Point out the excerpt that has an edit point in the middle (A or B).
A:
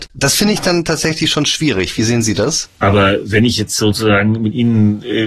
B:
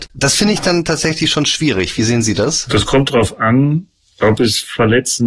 A